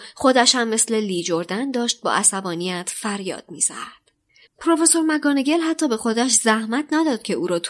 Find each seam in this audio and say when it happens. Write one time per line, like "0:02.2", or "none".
0:04.4